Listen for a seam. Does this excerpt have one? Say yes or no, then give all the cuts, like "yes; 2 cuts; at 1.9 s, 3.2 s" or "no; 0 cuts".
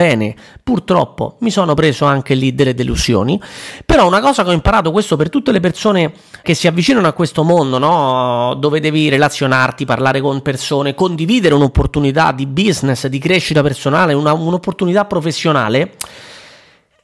yes; 1 cut; at 6.4 s